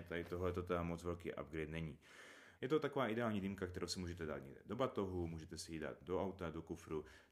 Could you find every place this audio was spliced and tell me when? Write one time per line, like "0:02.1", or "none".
0:02.5